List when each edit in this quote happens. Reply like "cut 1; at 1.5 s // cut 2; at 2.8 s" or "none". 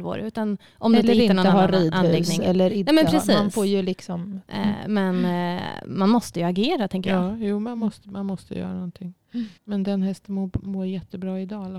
cut 1; at 4.5 s // cut 2; at 9.6 s